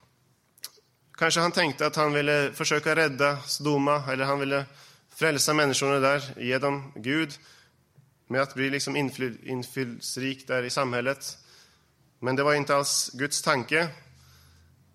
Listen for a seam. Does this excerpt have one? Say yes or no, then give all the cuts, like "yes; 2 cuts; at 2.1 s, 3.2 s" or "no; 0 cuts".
no; 0 cuts